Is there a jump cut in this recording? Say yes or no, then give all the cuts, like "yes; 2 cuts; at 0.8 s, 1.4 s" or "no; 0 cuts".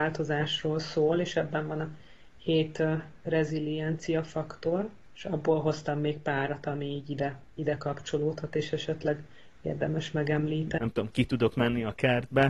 yes; 1 cut; at 10.8 s